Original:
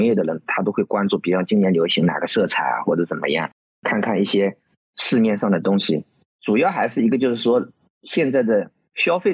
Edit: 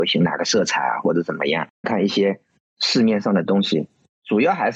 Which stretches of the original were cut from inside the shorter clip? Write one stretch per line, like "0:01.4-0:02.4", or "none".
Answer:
0:03.7-0:04.0